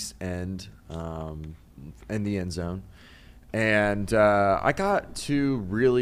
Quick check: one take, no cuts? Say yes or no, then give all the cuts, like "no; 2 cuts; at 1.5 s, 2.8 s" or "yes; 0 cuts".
yes; 0 cuts